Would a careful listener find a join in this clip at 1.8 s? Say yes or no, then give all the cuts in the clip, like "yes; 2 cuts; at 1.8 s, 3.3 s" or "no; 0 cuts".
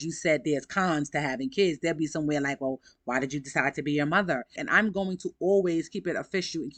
no; 1 cut; at 4.6 s